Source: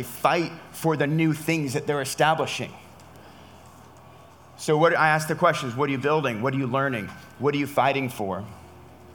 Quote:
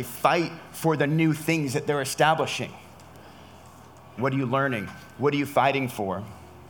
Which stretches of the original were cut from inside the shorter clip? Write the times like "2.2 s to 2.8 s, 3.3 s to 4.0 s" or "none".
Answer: 4.2 s to 6.4 s

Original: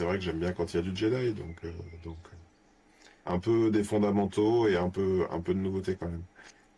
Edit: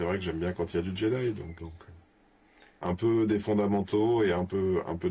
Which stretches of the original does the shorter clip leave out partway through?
1.6 s to 2.0 s

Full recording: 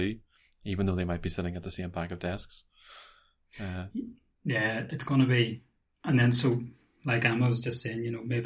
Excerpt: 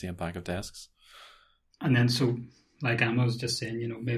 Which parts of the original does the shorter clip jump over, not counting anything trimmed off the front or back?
3.5 s to 5.9 s

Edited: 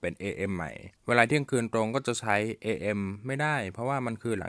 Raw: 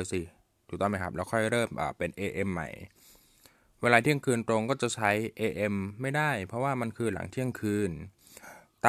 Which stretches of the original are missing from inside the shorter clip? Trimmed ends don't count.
2.9 s to 3.7 s

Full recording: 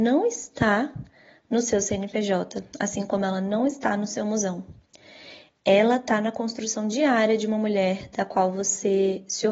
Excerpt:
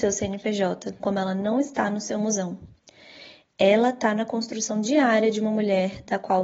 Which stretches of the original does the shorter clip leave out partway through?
2.7 s to 3.1 s

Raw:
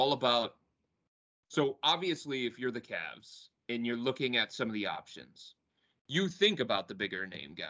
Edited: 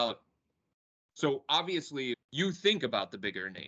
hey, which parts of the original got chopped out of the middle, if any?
2.5 s to 5.9 s

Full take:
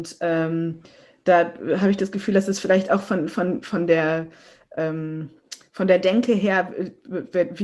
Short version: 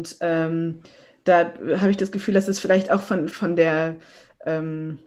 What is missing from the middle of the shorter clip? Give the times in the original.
3.3 s to 3.6 s

